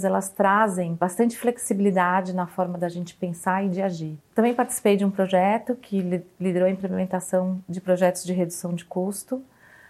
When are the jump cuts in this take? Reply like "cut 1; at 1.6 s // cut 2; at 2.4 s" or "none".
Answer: none

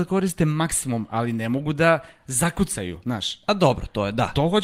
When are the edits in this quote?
none

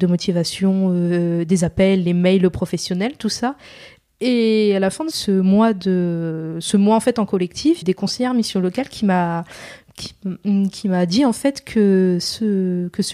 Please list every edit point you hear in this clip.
cut 1; at 5.1 s // cut 2; at 7.8 s

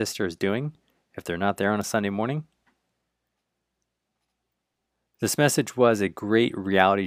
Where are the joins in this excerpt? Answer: none

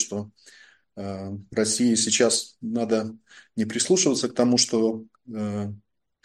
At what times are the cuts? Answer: none

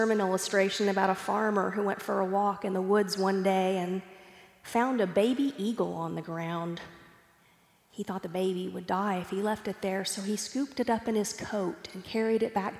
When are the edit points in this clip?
cut 1; at 7.9 s

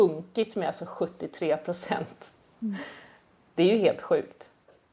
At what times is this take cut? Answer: none

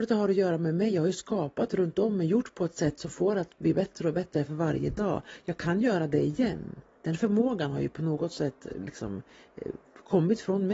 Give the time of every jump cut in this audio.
none

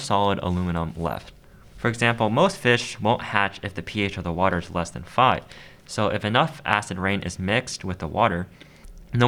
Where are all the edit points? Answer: cut 1; at 1.7 s

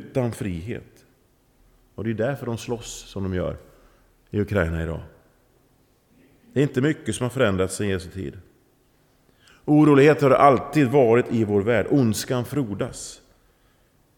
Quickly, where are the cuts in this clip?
none

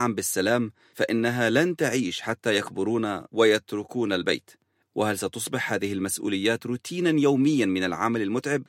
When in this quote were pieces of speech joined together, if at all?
cut 1; at 4.8 s

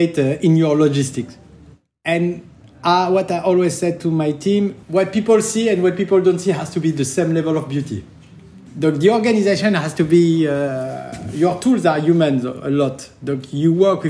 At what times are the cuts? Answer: cut 1; at 4.8 s

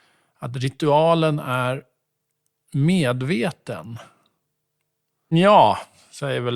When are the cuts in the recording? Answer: cut 1; at 5.3 s

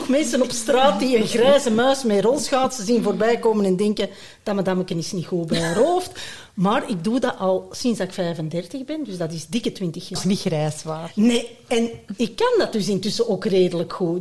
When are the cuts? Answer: cut 1; at 10.2 s

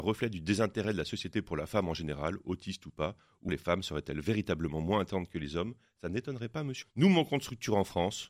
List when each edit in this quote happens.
cut 1; at 3.5 s // cut 2; at 6.8 s

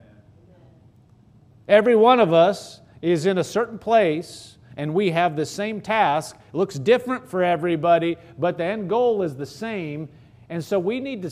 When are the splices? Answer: none

